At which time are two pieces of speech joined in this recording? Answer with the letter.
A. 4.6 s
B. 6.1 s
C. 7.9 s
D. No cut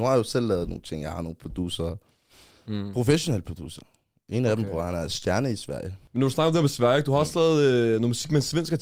D